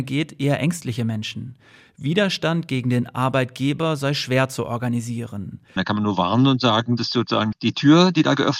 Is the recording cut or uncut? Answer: cut